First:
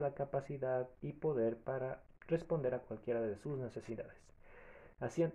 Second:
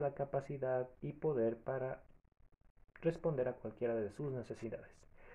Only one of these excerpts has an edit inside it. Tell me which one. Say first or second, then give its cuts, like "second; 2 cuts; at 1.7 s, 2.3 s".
first; 1 cut; at 2.2 s